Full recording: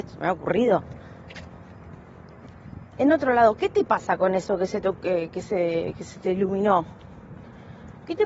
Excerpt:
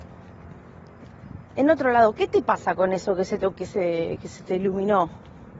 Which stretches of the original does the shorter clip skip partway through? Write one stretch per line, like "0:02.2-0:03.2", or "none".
0:05.0-0:05.3